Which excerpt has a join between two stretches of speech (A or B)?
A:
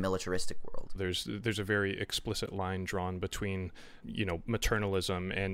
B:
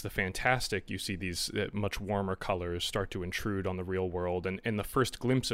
A